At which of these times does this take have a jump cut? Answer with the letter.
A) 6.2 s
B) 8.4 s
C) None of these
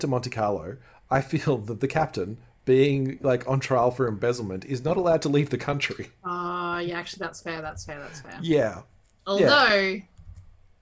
C